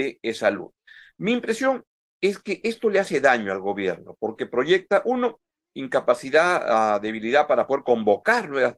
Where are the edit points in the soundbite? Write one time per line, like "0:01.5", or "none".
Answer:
none